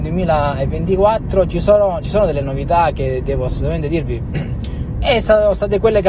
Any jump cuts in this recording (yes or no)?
yes